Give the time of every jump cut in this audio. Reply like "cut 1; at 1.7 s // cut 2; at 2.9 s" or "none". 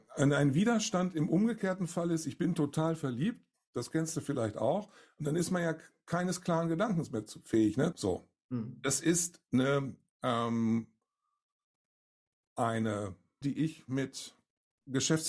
cut 1; at 7.9 s // cut 2; at 13.4 s